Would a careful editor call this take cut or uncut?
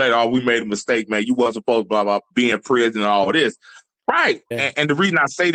cut